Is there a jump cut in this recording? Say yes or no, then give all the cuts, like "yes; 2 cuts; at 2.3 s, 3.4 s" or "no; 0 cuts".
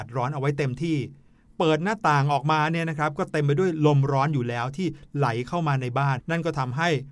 yes; 1 cut; at 6.2 s